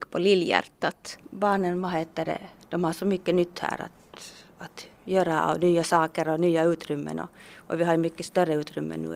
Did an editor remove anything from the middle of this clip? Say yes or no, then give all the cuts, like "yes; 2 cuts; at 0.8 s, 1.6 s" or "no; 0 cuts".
no; 0 cuts